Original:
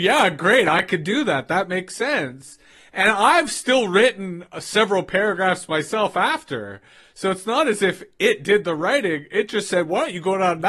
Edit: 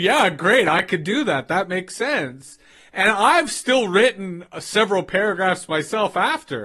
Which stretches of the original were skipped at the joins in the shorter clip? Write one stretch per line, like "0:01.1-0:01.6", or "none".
none